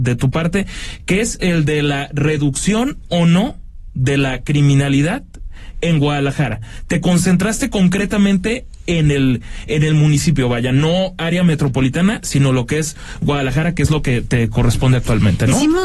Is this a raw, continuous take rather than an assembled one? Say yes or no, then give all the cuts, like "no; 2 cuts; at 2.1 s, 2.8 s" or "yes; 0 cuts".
yes; 0 cuts